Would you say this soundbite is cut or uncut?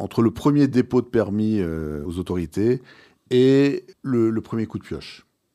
cut